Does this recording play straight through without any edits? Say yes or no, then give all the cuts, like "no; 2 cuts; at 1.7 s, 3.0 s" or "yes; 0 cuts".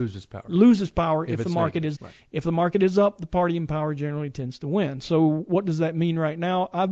no; 1 cut; at 1.9 s